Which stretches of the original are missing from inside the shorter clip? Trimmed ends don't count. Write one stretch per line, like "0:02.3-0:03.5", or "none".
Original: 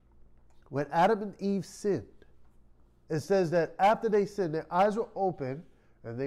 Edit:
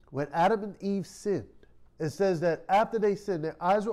0:02.5-0:03.0